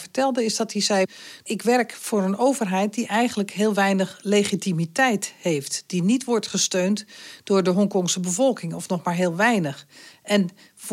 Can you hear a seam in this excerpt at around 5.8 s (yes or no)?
no